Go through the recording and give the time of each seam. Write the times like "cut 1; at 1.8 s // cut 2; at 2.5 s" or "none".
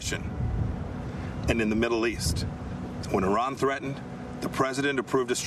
none